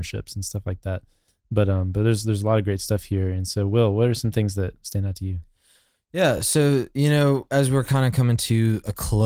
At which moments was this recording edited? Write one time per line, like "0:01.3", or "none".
none